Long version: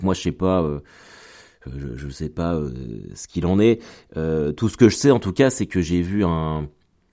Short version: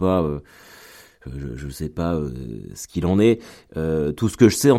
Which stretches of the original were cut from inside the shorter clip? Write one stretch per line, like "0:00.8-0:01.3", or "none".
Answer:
none